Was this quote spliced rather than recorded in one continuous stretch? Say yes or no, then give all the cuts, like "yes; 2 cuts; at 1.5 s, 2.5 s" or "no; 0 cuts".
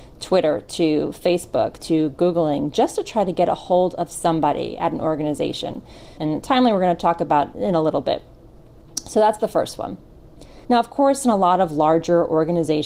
yes; 3 cuts; at 6.2 s, 7.5 s, 10.6 s